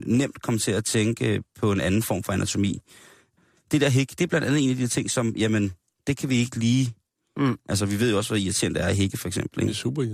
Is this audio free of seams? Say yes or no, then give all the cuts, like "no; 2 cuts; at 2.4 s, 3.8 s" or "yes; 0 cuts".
yes; 0 cuts